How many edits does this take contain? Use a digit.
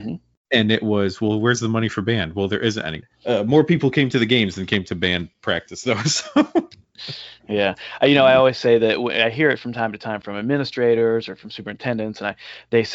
1